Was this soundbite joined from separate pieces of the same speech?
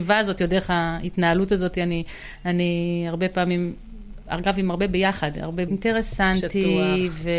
yes; 1 cut; at 5.7 s

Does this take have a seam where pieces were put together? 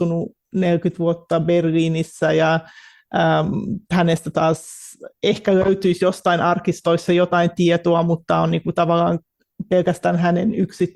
no; 0 cuts

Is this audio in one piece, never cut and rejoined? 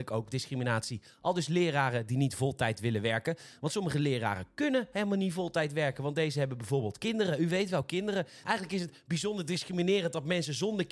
no; 1 cut; at 8.4 s

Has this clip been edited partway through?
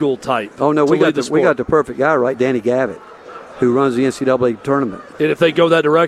yes; 2 cuts; at 2.3 s, 5.1 s

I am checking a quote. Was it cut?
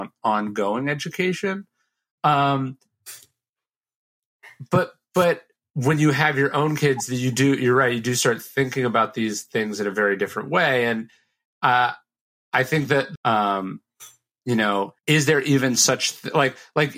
yes; 2 cuts; at 13.2 s, 15.0 s

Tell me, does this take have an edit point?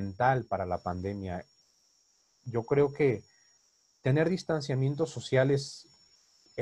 no; 0 cuts

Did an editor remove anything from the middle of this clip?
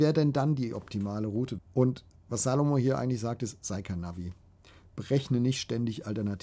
yes; 1 cut; at 1.6 s

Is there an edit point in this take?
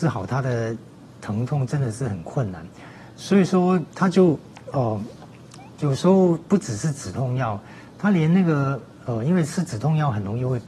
yes; 1 cut; at 5.8 s

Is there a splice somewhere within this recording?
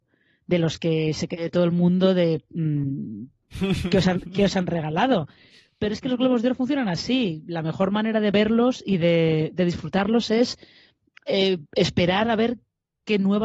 yes; 1 cut; at 3.4 s

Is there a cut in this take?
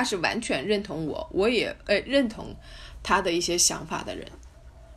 no; 0 cuts

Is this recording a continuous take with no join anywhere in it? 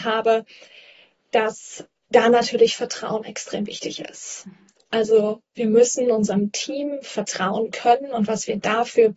yes; 0 cuts

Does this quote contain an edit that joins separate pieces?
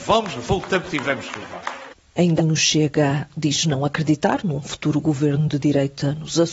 yes; 1 cut; at 2.4 s

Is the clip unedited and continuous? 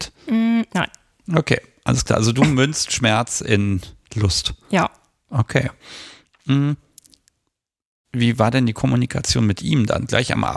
yes; 0 cuts

